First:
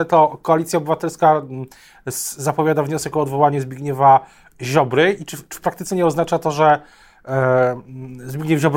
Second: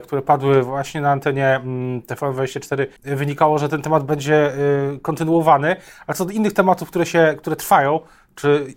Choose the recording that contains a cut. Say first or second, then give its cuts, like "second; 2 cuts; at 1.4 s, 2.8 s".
second; 1 cut; at 3.0 s